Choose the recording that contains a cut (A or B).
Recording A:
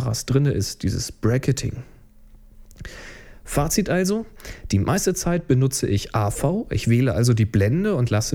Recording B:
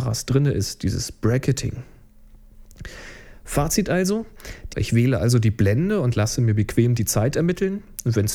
B